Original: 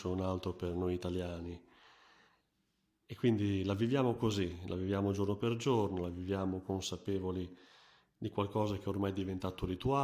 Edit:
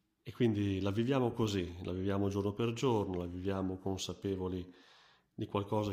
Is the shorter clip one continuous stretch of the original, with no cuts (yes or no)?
yes